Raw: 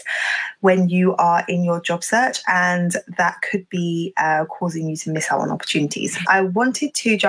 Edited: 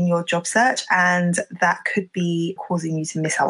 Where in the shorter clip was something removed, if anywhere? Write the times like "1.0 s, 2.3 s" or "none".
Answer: 2.6 s